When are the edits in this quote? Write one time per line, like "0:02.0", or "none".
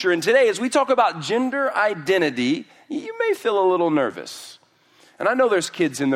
none